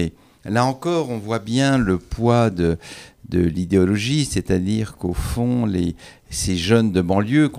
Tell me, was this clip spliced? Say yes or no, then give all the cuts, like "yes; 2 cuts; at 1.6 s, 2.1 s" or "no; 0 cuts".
no; 0 cuts